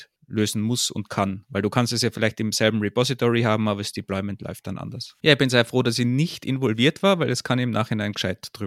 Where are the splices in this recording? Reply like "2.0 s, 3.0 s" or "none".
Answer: 5.2 s